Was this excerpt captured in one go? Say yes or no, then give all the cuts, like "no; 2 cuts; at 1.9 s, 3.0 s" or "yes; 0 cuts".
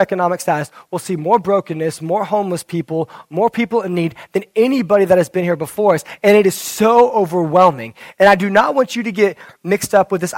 yes; 0 cuts